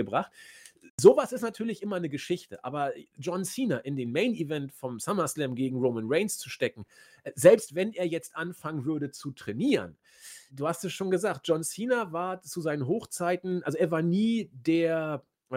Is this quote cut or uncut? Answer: cut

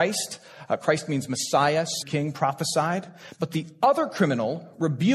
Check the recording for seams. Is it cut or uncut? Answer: cut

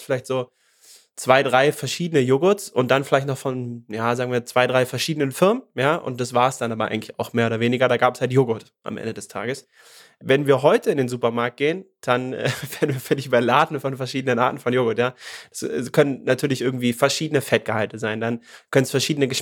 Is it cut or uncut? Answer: uncut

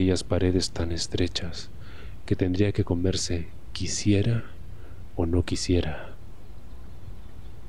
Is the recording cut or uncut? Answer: cut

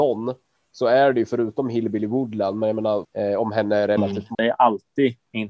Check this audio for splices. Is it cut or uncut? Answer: cut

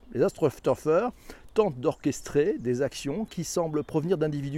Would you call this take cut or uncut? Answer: uncut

